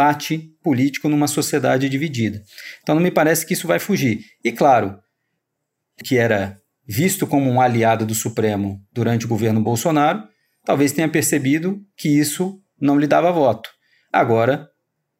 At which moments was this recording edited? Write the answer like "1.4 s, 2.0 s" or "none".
6.0 s